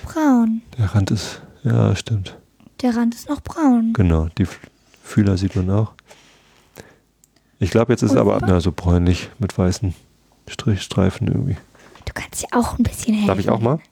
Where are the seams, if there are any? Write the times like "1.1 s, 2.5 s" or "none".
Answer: 8.4 s, 12.0 s